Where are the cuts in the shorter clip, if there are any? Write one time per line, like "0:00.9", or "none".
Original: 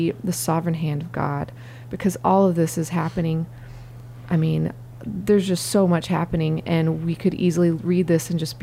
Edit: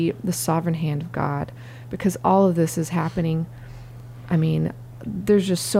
none